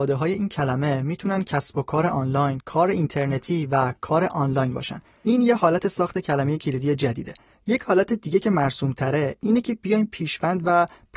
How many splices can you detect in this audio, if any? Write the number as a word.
one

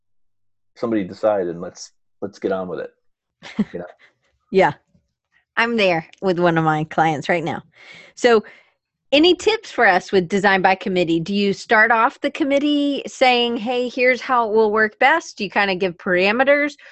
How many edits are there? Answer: zero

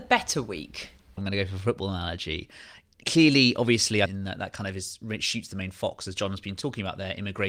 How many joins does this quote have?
two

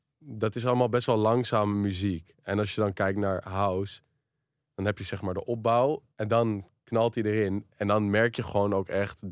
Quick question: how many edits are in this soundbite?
one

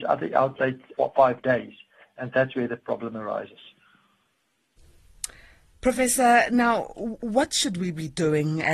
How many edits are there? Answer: one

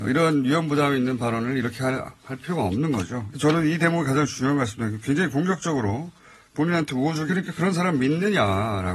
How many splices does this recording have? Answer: two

